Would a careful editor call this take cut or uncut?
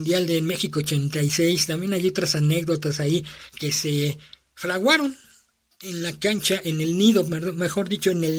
uncut